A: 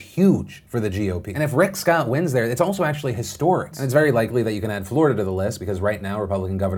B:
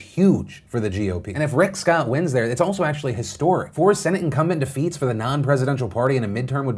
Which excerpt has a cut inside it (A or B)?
A